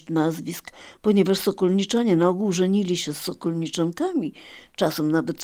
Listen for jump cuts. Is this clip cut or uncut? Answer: cut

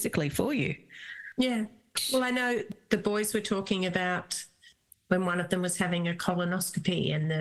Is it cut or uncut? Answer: uncut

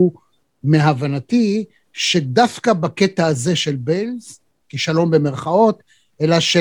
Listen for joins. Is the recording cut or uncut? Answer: cut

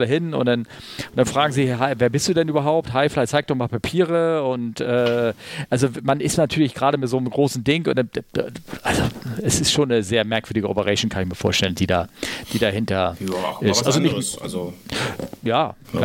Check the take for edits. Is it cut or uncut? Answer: uncut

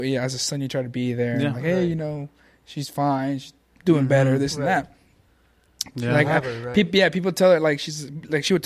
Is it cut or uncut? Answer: cut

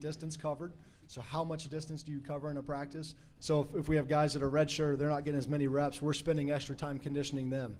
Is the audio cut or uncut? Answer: cut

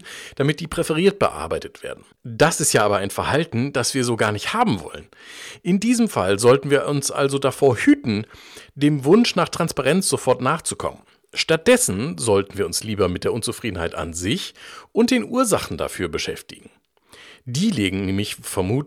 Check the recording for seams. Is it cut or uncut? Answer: uncut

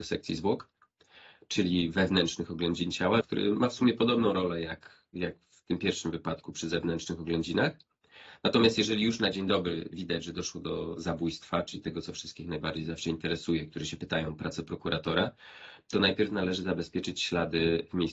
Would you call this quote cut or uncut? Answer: cut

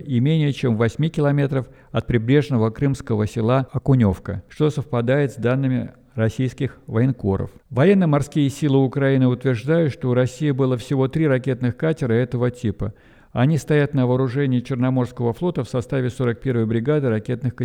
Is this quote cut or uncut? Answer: cut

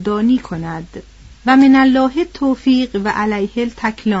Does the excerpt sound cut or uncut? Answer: cut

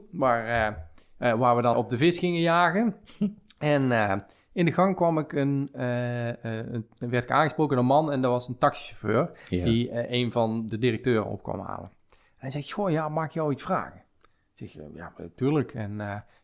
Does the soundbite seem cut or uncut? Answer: cut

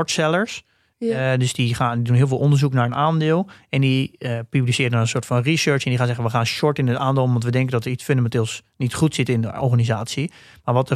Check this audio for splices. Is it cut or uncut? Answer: uncut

